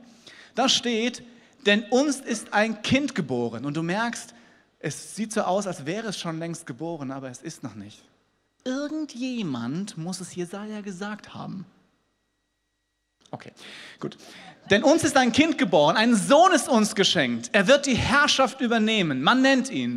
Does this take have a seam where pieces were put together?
no; 0 cuts

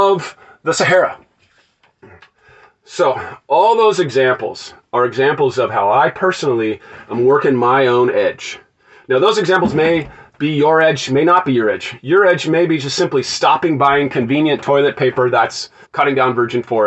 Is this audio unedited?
no; 1 cut; at 15.8 s

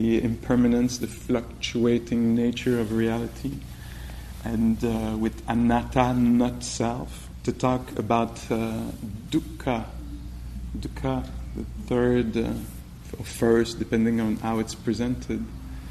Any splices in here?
no; 0 cuts

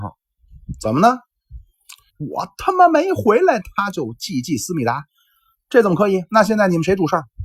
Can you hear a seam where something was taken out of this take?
yes; 1 cut; at 2.1 s

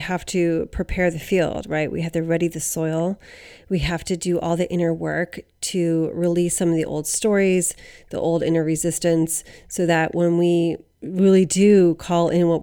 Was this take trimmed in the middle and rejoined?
no; 0 cuts

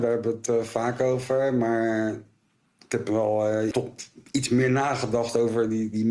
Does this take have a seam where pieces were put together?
yes; 1 cut; at 3.7 s

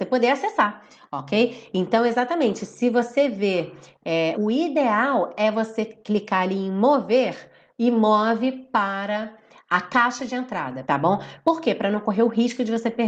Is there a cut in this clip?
yes; 2 cuts; at 4.3 s, 10.8 s

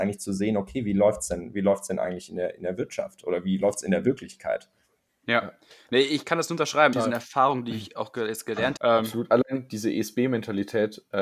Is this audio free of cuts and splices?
no; 2 cuts; at 6.9 s, 8.8 s

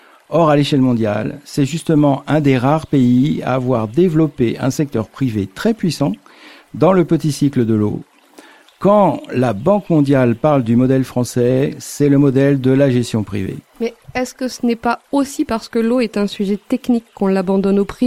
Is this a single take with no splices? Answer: yes; 0 cuts

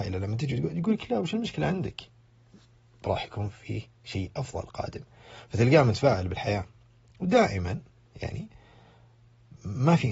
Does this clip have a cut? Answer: no; 0 cuts

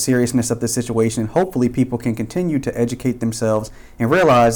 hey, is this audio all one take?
yes; 0 cuts

